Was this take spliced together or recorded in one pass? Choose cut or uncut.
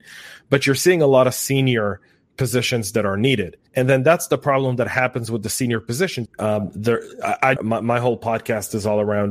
cut